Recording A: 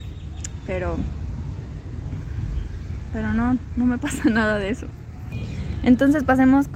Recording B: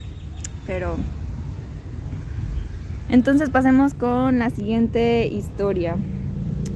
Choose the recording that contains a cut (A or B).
B